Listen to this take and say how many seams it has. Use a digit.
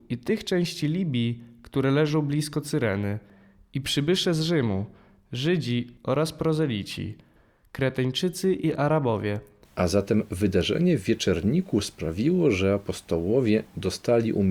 1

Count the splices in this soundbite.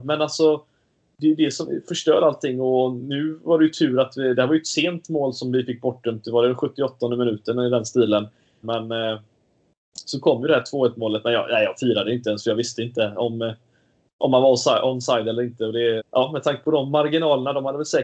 2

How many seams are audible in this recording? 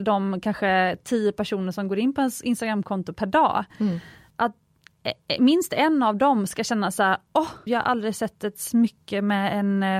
1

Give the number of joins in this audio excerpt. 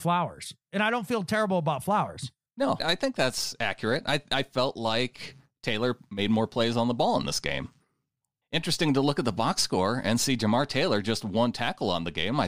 1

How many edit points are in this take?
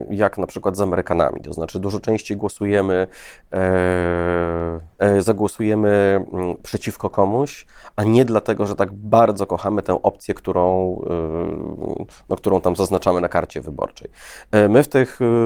1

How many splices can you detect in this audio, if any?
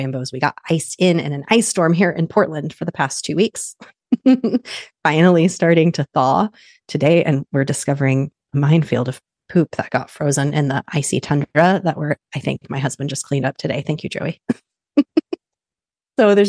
0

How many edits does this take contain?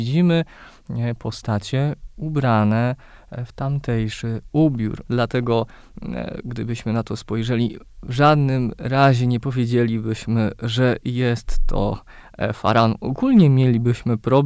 1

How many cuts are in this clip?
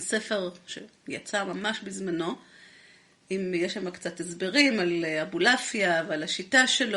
0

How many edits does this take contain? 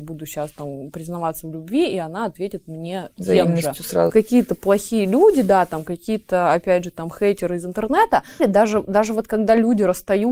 2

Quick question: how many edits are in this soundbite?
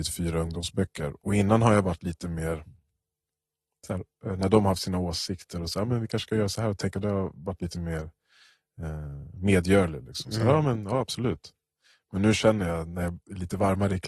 0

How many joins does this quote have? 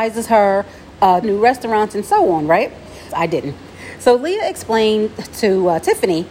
2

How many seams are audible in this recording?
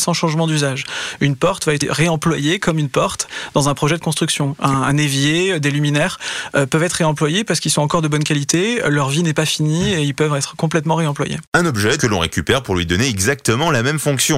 1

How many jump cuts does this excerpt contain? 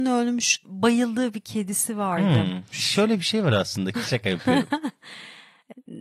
2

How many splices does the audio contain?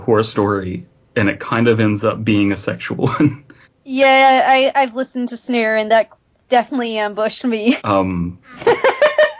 2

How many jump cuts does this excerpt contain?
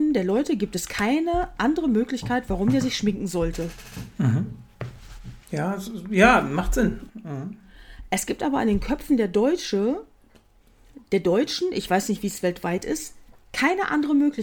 2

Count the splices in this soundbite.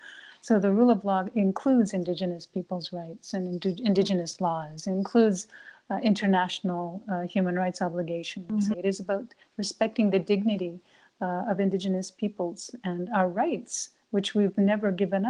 1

